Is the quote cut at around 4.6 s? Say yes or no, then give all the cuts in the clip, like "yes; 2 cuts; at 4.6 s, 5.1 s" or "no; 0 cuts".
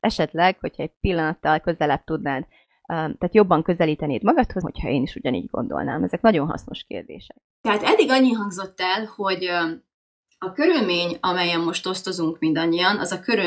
yes; 1 cut; at 4.6 s